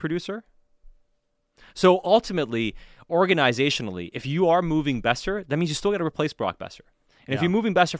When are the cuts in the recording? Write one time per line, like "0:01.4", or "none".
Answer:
none